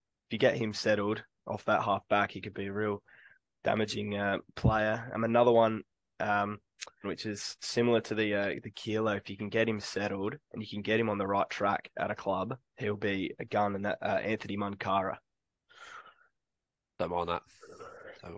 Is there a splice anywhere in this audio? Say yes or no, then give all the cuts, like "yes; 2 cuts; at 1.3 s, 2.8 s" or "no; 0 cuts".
yes; 2 cuts; at 7.0 s, 12.7 s